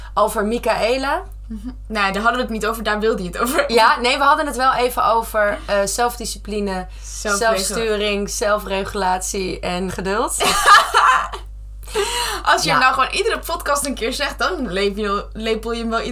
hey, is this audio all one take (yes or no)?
no